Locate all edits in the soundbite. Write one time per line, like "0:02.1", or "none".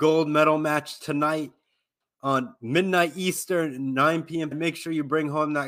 0:04.5